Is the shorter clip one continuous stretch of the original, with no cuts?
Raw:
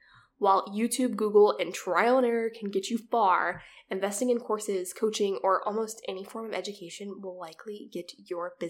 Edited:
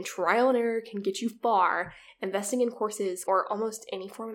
no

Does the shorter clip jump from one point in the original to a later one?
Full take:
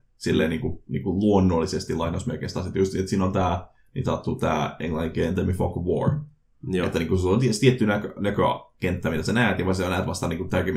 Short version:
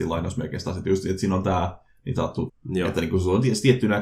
yes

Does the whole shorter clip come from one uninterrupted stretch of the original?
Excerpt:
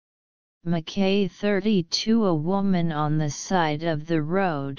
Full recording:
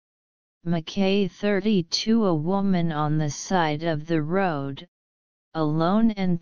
yes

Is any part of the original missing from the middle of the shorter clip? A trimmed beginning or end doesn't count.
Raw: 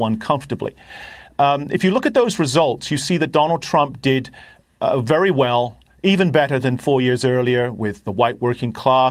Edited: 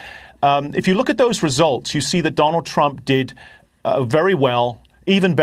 no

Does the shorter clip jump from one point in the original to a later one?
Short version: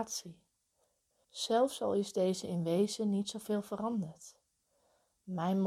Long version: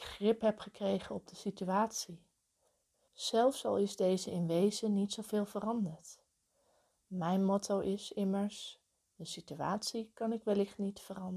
no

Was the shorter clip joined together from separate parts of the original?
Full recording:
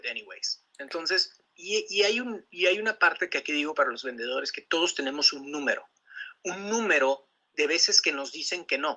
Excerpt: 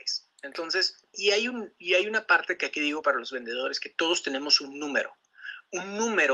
yes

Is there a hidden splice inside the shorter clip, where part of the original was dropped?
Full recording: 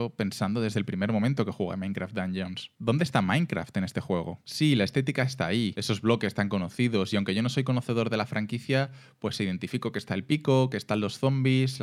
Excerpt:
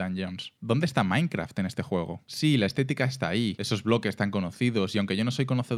no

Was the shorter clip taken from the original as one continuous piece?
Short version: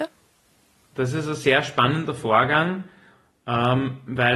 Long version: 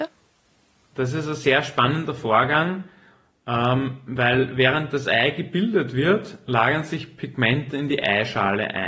yes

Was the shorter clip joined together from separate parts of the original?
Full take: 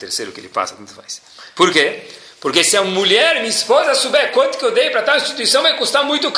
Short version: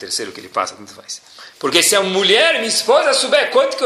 yes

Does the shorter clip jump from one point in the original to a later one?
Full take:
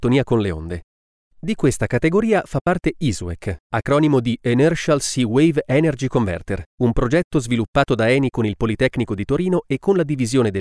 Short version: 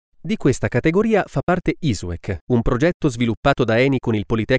yes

